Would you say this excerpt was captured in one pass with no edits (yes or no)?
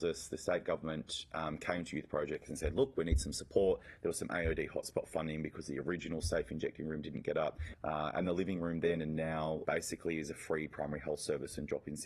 no